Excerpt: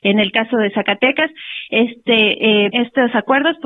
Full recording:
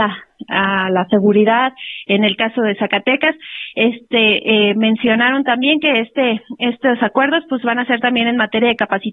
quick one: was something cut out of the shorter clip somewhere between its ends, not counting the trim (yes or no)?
yes